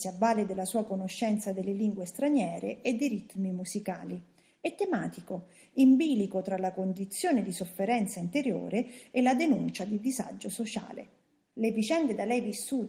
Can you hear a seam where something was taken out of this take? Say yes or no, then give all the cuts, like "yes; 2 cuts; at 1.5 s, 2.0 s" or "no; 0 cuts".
yes; 1 cut; at 11.5 s